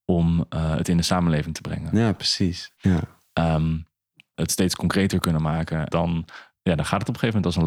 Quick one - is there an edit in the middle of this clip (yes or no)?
yes